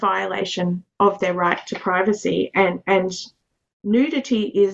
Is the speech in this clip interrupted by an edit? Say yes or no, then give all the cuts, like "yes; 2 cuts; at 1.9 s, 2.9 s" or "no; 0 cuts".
no; 0 cuts